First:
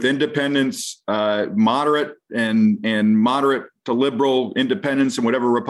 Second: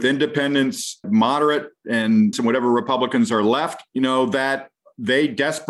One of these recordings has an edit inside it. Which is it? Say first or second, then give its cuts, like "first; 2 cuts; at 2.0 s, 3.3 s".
second; 3 cuts; at 1.0 s, 2.3 s, 3.9 s